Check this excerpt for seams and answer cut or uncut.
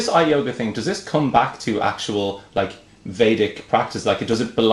uncut